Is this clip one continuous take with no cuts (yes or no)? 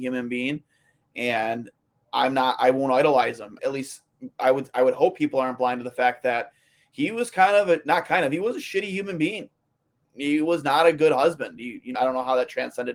no